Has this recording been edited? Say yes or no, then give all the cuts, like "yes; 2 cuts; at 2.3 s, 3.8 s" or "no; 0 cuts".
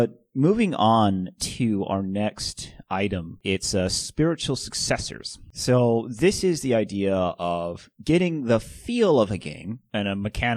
no; 0 cuts